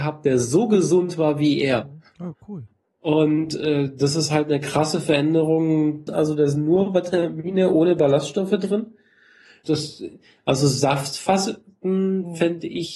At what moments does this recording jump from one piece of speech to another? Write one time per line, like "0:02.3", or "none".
0:06.1
0:09.6